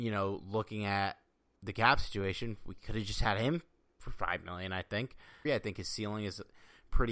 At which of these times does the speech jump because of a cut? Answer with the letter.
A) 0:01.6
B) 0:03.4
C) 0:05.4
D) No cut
C